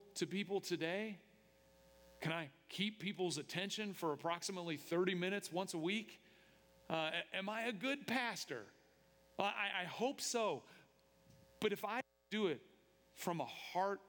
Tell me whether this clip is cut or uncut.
uncut